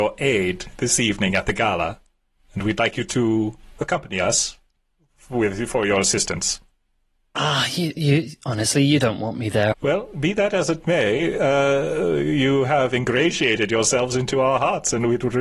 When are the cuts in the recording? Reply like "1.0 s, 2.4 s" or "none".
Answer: 9.7 s